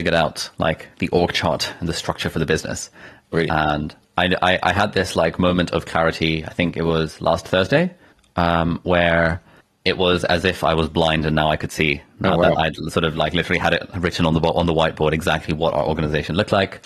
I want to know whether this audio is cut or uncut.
uncut